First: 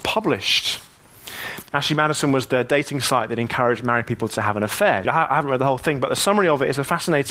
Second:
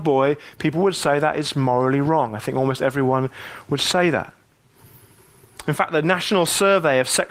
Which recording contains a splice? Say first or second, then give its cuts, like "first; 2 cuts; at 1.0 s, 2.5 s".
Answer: first; 2 cuts; at 1.6 s, 5.0 s